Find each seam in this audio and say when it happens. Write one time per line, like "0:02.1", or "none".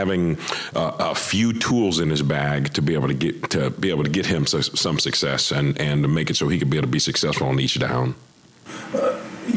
none